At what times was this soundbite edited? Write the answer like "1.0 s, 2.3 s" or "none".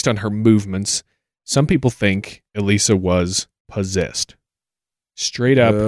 2.5 s, 3.6 s